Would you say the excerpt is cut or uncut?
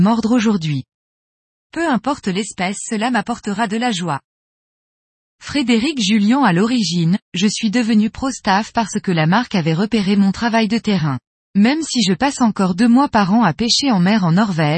cut